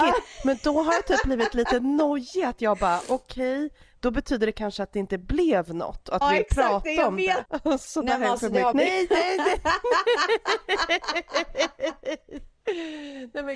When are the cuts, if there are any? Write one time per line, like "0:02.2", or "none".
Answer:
0:06.2
0:07.4
0:08.7